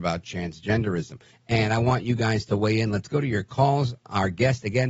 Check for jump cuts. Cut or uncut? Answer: cut